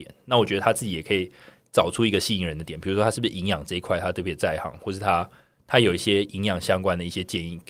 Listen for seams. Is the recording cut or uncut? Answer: uncut